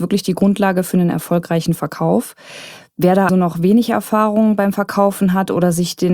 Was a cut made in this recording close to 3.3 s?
yes; 1 cut; at 3.3 s

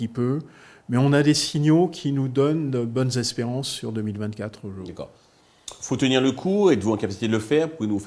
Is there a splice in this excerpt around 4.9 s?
no; 0 cuts

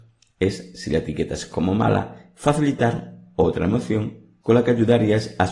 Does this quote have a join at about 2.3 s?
yes; 1 cut; at 2.3 s

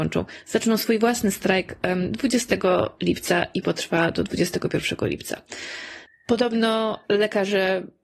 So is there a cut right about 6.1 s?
yes; 1 cut; at 6.1 s

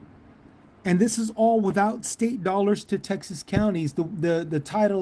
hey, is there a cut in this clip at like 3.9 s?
no; 0 cuts

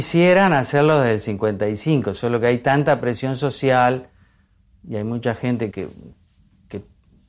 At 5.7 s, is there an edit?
yes; 1 cut; at 5.7 s

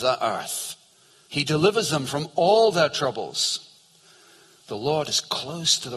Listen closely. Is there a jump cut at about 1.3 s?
yes; 1 cut; at 1.3 s

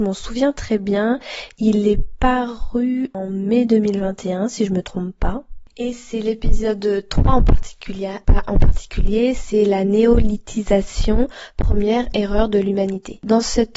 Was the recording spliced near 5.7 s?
yes; 1 cut; at 5.7 s

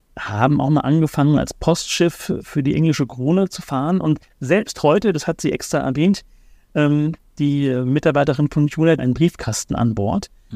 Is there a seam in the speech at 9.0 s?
yes; 1 cut; at 9.0 s

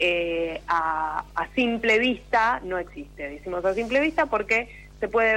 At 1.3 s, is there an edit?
yes; 1 cut; at 1.3 s

